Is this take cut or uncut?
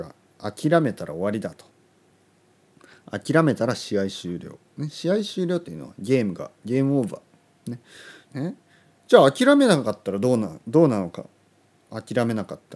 cut